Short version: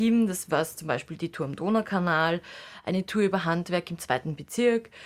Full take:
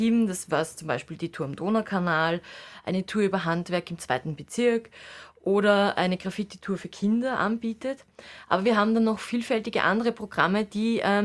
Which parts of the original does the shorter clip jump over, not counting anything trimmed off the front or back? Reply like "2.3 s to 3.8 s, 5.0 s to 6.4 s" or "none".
none